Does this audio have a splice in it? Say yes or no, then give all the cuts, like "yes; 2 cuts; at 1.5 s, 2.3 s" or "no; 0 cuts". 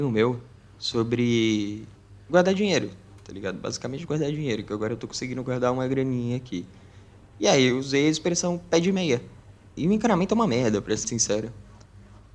yes; 2 cuts; at 9.8 s, 11.0 s